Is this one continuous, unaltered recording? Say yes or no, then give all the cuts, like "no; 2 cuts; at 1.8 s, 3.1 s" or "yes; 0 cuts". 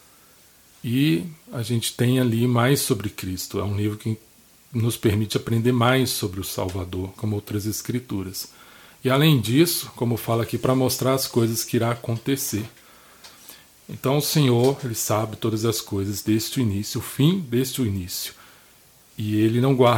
no; 1 cut; at 7.1 s